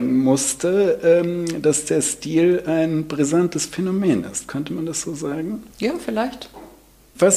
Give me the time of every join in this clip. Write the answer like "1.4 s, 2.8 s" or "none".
5.7 s